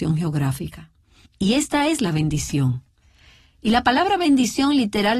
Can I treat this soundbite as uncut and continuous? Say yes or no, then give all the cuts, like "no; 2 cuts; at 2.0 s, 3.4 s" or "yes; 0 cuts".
no; 1 cut; at 1.3 s